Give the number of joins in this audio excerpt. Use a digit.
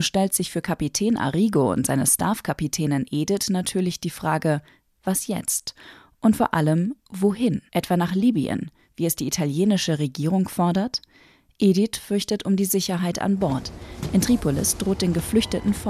1